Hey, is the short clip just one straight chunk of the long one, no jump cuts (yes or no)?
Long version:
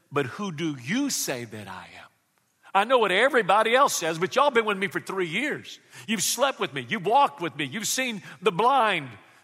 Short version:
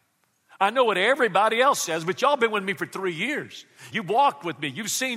no